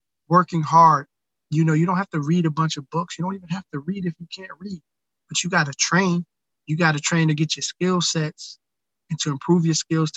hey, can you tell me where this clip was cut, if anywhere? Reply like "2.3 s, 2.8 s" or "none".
1.4 s